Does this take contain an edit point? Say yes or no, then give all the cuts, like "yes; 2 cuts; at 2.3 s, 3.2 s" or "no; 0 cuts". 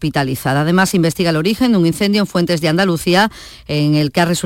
no; 0 cuts